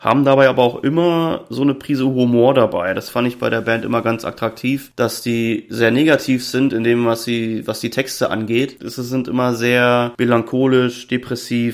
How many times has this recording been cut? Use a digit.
1